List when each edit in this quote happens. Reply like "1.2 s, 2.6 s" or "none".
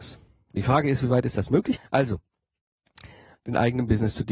1.8 s, 3.3 s